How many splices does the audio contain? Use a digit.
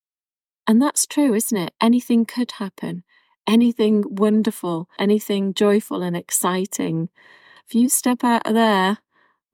2